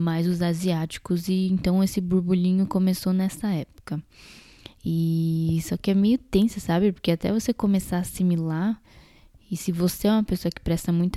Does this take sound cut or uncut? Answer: uncut